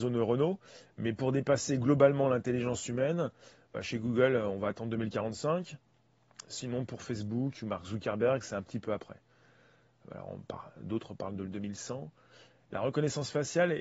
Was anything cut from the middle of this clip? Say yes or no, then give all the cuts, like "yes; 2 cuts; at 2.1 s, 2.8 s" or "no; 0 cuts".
no; 0 cuts